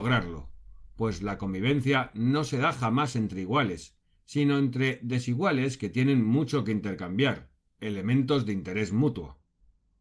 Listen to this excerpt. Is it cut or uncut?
cut